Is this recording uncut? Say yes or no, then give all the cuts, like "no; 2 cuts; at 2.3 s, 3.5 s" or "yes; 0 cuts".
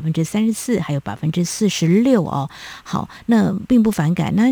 yes; 0 cuts